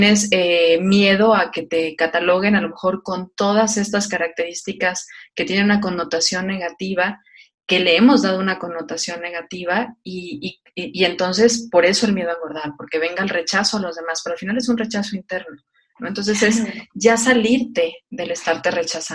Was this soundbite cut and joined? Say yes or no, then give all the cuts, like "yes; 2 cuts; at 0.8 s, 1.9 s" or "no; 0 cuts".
no; 0 cuts